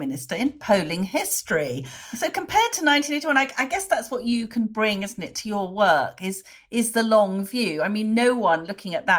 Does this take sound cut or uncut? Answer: uncut